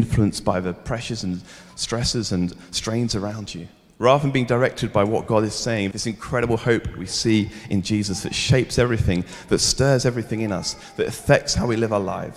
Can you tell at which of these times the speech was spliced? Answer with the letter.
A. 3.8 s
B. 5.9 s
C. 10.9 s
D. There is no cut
B